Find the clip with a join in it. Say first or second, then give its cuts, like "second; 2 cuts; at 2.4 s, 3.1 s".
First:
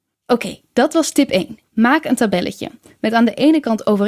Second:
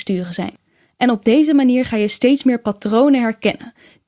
first; 1 cut; at 1.6 s